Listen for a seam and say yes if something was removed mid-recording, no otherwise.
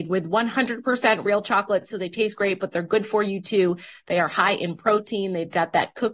no